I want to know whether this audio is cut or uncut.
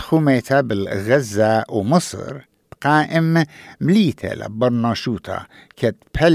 uncut